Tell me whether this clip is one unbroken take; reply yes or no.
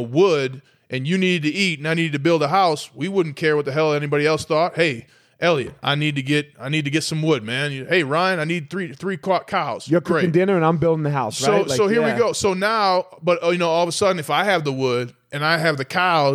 yes